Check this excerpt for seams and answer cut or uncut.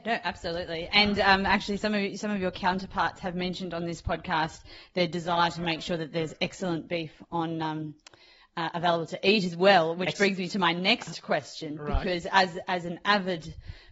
uncut